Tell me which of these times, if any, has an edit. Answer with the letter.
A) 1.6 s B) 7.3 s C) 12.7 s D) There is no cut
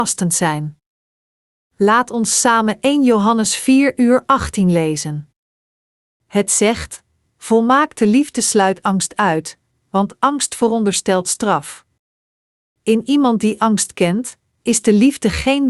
B